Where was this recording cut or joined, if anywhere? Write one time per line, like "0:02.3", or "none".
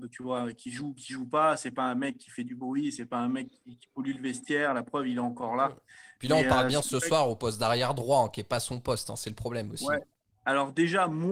none